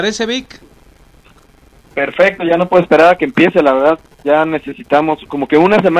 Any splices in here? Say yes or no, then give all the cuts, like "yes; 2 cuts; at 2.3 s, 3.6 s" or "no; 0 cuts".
no; 0 cuts